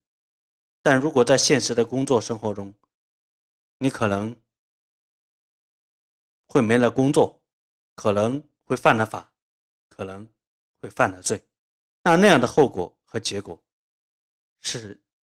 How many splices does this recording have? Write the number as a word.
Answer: zero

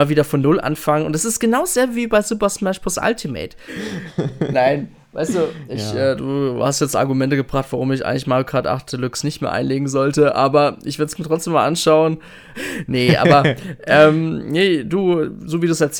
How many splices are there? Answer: two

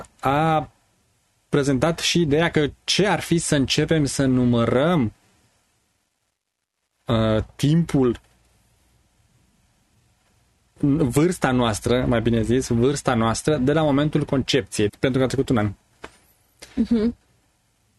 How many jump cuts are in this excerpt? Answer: one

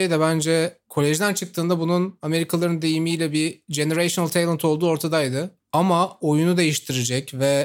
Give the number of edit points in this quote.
one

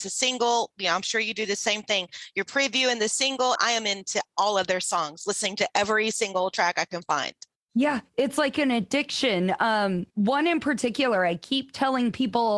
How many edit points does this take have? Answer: two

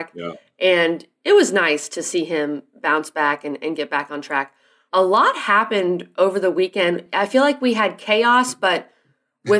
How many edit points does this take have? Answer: one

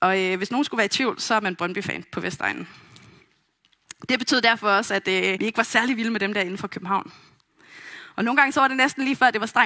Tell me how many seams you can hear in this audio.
one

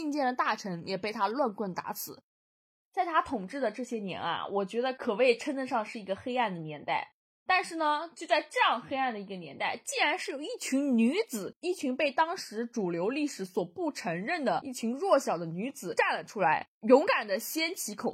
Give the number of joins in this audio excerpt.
zero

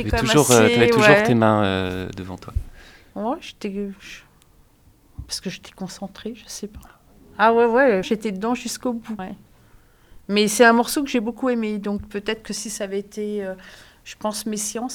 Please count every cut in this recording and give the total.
two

